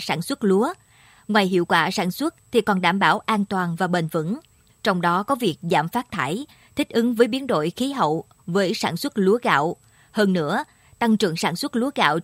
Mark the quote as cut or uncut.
cut